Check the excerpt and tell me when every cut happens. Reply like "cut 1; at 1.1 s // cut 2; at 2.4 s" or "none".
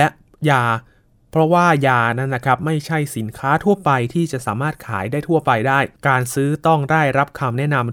cut 1; at 6.0 s